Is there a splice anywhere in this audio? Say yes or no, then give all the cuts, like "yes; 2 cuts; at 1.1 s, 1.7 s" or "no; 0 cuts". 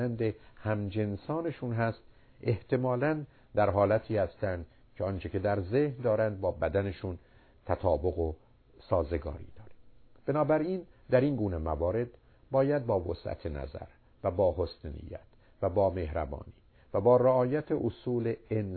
no; 0 cuts